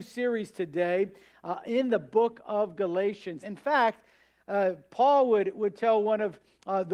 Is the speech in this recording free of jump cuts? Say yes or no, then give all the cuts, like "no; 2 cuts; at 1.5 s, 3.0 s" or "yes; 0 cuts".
no; 1 cut; at 3.4 s